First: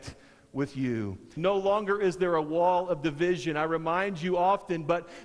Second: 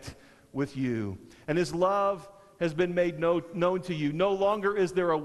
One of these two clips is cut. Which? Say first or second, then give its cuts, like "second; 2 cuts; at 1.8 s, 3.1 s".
first; 1 cut; at 1.4 s